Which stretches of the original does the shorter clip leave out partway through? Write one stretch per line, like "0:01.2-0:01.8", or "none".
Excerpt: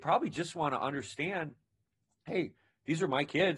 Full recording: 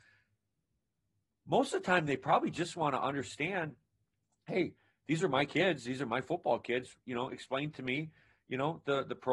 none